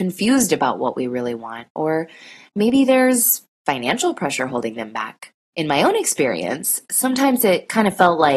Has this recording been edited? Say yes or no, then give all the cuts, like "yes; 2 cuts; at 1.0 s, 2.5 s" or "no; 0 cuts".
yes; 1 cut; at 5.5 s